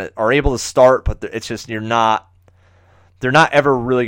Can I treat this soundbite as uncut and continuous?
yes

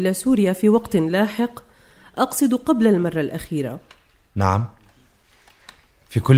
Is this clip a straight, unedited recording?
yes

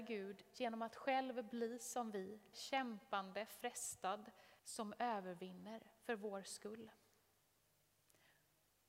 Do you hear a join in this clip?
yes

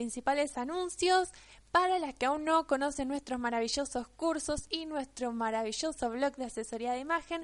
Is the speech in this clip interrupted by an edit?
no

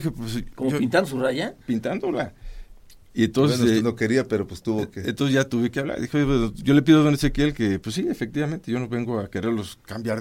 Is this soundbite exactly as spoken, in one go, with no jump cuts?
yes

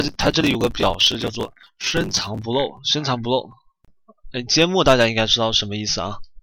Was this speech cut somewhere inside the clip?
yes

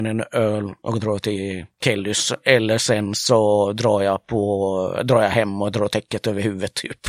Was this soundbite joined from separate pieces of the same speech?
no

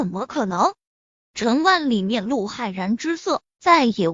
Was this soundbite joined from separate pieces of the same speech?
no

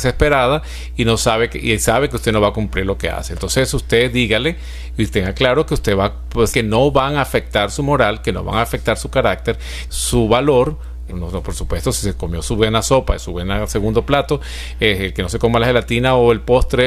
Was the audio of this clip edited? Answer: yes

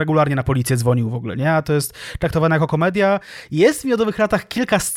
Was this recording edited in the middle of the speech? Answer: no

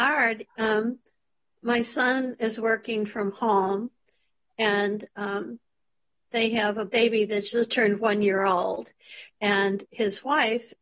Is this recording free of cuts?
yes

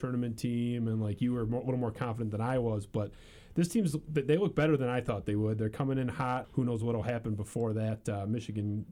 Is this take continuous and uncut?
no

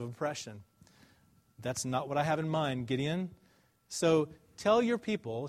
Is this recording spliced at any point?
no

